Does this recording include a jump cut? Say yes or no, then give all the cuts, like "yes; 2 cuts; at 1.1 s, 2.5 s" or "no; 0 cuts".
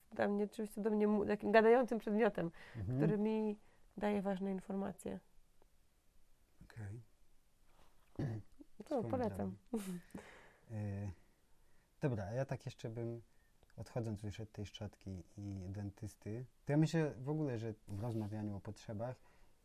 yes; 3 cuts; at 8.1 s, 16.6 s, 17.9 s